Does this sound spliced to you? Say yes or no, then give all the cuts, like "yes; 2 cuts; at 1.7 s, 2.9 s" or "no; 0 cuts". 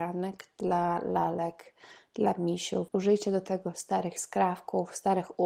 yes; 1 cut; at 2.9 s